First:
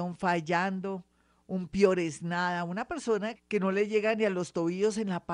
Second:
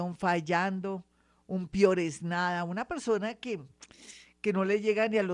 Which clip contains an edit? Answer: first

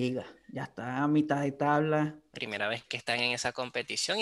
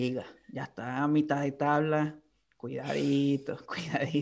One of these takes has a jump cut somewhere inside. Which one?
first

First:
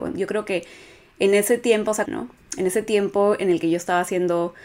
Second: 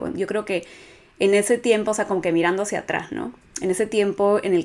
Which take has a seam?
first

